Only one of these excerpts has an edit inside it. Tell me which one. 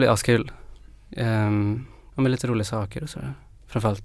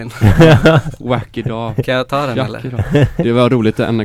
first; 1 cut; at 2.1 s

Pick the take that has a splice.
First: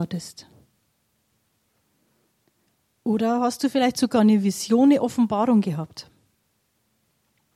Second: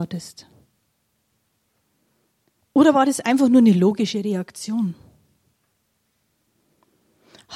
second; 1 cut; at 2.6 s

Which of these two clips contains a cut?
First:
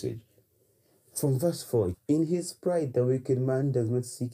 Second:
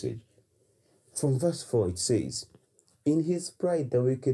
first; 1 cut; at 1.9 s

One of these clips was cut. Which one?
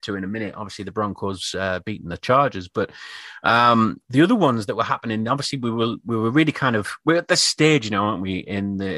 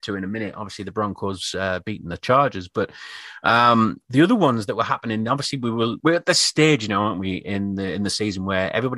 second; 1 cut; at 6.0 s

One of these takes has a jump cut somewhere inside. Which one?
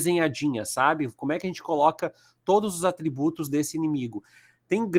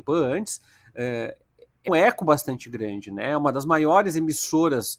second; 1 cut; at 1.9 s

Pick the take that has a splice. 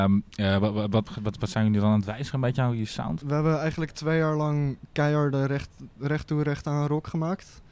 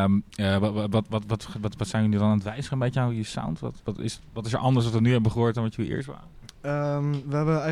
first; 2 cuts; at 1.1 s, 3.2 s

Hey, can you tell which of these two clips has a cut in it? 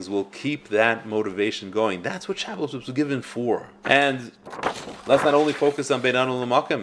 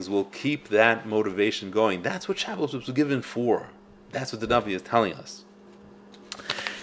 first; 1 cut; at 3.8 s

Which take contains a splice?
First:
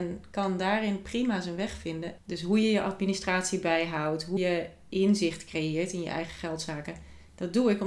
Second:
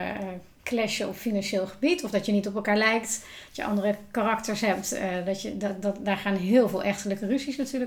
first; 2 cuts; at 2.2 s, 4.4 s

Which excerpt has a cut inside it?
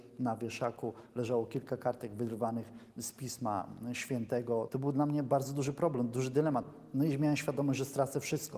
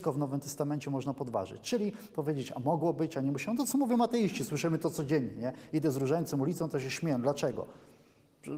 first; 1 cut; at 4.7 s

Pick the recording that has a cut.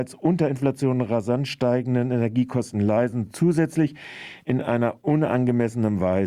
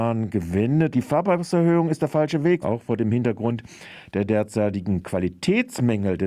second; 2 cuts; at 0.9 s, 2.6 s

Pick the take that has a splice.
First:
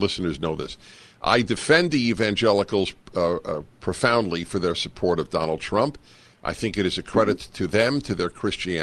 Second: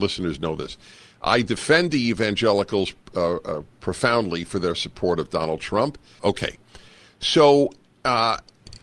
second; 1 cut; at 6.2 s

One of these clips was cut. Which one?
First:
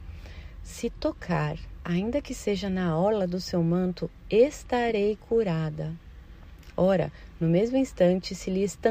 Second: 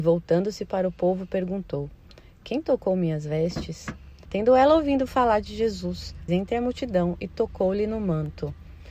second; 2 cuts; at 4.3 s, 6.3 s

